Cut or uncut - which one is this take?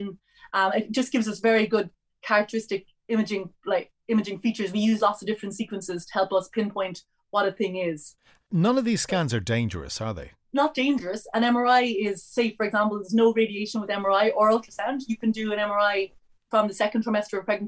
uncut